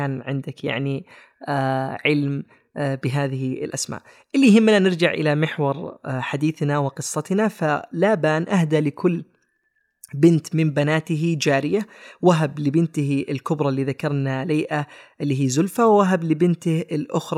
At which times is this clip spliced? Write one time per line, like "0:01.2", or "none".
none

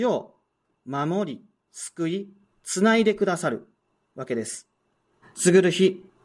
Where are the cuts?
0:05.2

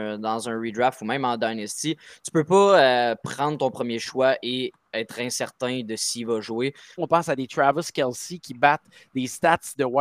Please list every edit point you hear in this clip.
0:07.0

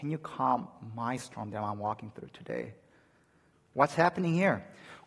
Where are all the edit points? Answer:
0:03.5

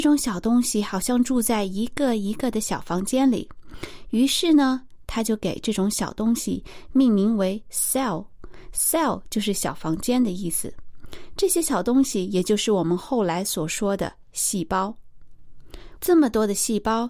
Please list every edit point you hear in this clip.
0:15.9

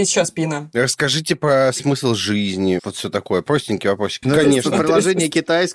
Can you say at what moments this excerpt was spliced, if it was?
0:02.8
0:04.2

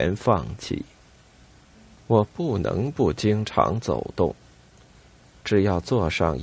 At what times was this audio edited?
none

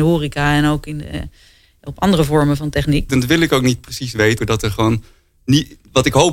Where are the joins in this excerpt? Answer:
0:03.1
0:04.4

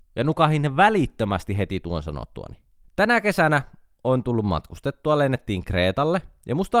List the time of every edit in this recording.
0:02.8

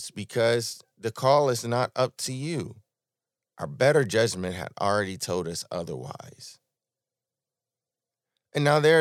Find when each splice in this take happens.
0:03.4

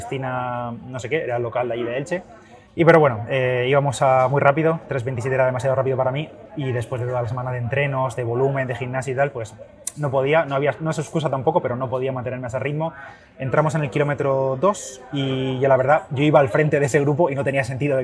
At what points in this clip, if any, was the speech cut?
0:02.7

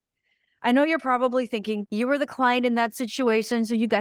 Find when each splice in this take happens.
0:01.8

